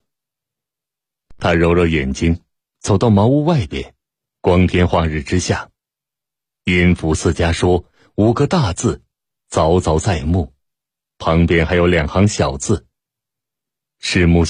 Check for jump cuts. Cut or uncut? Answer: uncut